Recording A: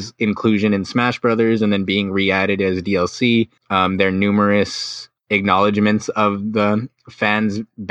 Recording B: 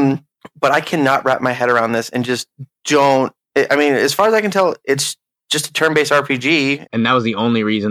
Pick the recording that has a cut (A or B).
B